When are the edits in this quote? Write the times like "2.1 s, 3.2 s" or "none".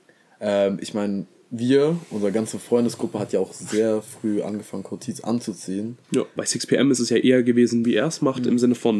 6.4 s, 7.8 s